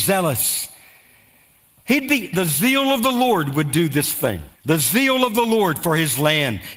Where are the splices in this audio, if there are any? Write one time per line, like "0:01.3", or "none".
0:02.3
0:04.5